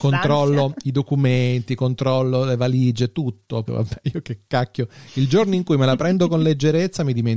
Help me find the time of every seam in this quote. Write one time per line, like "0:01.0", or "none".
0:03.7